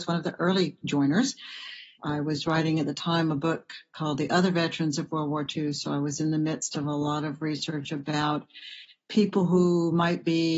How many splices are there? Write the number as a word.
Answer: one